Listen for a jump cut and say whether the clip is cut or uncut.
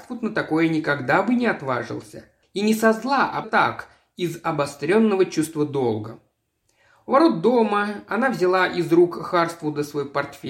cut